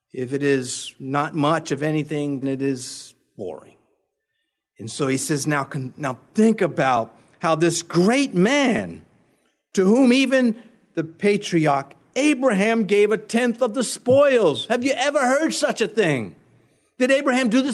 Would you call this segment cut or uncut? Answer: cut